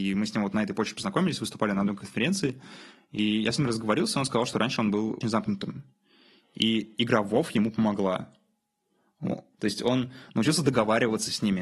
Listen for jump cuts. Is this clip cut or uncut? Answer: cut